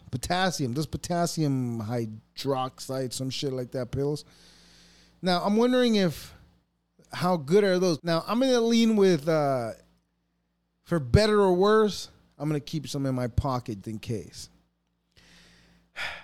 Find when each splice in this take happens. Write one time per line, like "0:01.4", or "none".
0:08.0
0:13.8